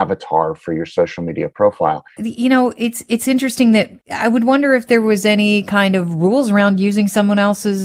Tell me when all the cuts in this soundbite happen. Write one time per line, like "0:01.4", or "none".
0:02.2
0:04.0